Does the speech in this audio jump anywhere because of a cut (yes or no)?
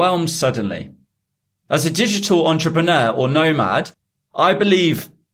no